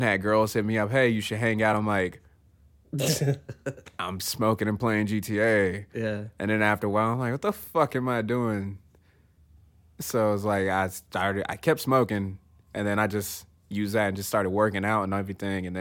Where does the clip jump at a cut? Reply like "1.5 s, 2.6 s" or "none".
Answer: none